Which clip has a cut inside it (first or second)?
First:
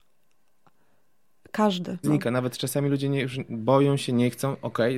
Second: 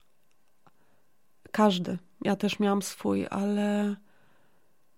first